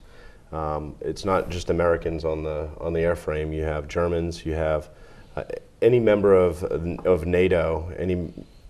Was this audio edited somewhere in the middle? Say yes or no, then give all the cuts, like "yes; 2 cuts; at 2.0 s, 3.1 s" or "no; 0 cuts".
no; 0 cuts